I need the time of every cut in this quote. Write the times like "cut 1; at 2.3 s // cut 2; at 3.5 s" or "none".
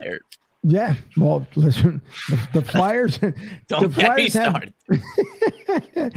none